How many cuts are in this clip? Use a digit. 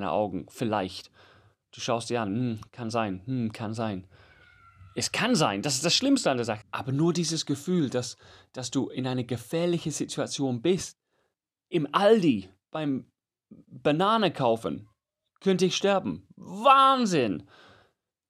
2